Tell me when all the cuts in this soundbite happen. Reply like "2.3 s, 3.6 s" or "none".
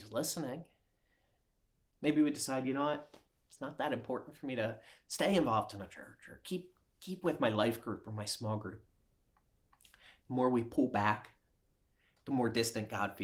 none